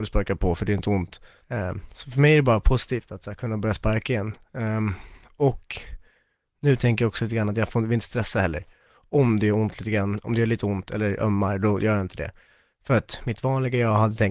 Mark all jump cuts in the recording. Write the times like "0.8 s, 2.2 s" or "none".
1.4 s

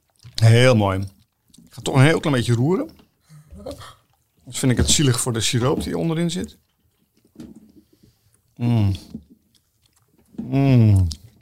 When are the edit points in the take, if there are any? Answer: none

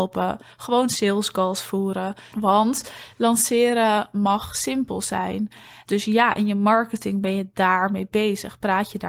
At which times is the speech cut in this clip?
2.3 s, 5.8 s

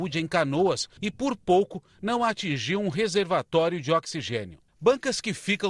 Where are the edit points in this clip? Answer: 1.0 s, 4.7 s

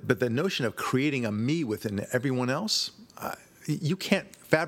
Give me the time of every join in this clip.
none

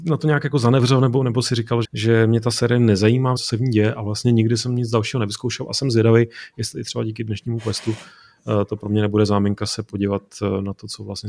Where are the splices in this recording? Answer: 1.8 s, 3.4 s

